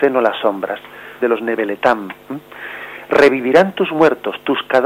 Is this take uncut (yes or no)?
no